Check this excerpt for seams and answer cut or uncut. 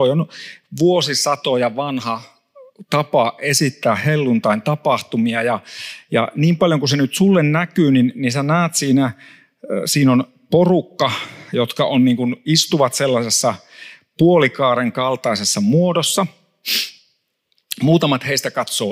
uncut